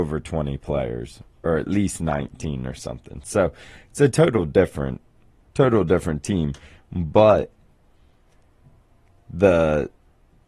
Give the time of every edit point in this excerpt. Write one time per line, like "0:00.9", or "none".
0:05.5